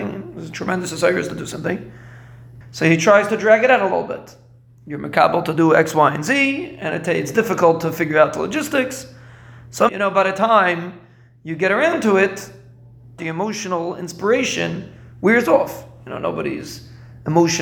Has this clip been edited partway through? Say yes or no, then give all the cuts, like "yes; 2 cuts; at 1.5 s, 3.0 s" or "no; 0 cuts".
yes; 3 cuts; at 2.6 s, 9.9 s, 13.2 s